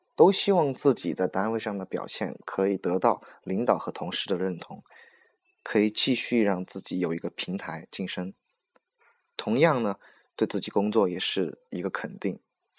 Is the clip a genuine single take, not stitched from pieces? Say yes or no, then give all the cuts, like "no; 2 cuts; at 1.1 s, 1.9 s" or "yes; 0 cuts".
yes; 0 cuts